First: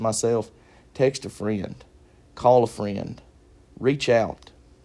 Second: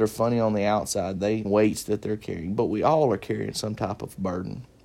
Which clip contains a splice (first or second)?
second